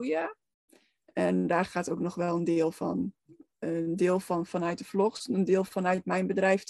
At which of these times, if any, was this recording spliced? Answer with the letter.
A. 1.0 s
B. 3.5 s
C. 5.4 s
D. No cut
A